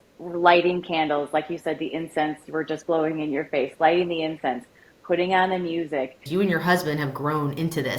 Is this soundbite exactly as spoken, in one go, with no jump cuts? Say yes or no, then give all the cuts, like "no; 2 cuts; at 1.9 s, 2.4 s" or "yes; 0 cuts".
no; 1 cut; at 6.3 s